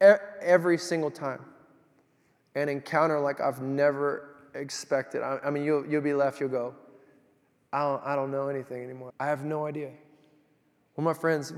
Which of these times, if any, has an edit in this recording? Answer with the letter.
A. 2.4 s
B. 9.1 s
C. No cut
B